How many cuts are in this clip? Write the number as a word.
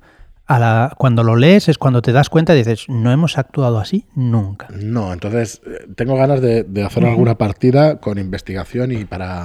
zero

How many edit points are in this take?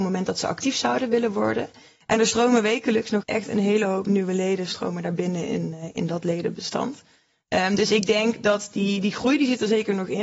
one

